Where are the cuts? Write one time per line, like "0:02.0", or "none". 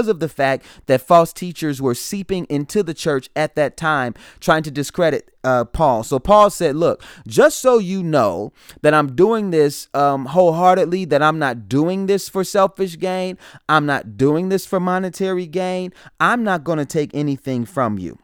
none